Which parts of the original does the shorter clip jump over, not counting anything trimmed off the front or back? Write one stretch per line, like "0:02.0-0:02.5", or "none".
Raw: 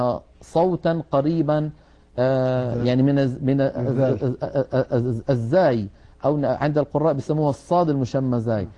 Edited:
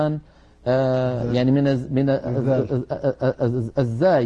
none